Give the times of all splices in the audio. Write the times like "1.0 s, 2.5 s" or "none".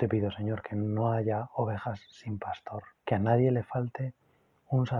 3.0 s